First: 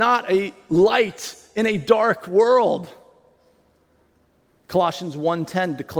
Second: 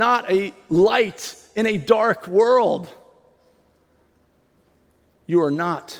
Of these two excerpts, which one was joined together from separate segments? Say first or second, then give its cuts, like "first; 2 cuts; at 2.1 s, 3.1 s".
first; 1 cut; at 4.5 s